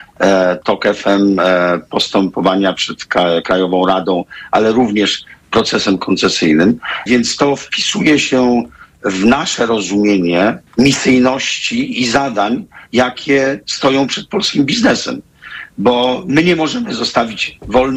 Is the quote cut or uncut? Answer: cut